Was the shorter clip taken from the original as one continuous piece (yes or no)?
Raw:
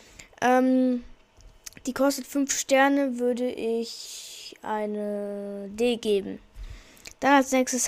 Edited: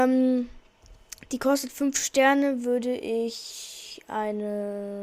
yes